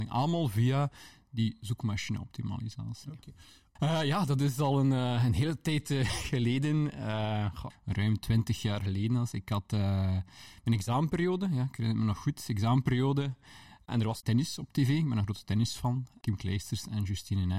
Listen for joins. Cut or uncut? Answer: cut